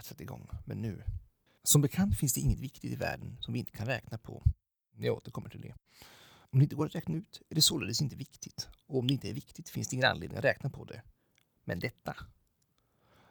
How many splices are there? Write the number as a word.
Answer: one